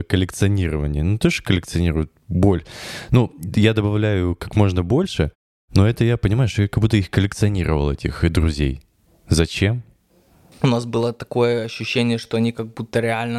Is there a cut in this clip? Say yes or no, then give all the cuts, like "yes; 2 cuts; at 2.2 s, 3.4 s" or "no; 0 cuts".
no; 0 cuts